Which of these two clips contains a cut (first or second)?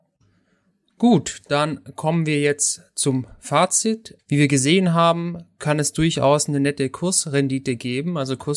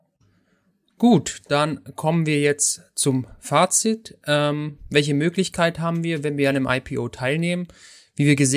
first